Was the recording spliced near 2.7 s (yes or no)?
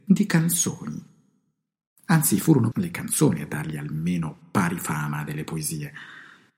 yes